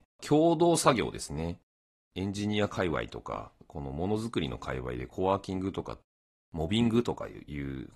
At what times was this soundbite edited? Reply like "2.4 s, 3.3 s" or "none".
none